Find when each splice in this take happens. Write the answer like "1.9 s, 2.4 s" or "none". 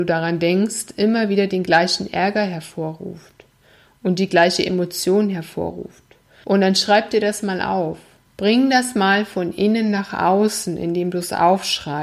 none